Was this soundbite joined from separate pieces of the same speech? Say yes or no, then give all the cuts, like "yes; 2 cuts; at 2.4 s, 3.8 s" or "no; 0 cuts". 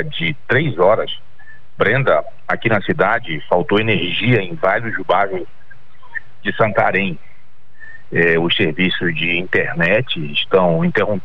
no; 0 cuts